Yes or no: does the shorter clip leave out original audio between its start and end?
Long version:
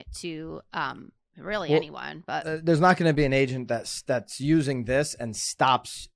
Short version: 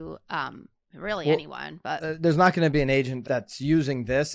yes